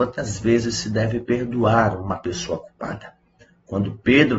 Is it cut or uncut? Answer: uncut